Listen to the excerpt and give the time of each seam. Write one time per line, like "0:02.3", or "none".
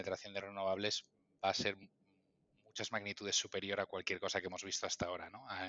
none